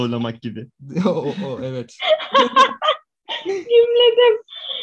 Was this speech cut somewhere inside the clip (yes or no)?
no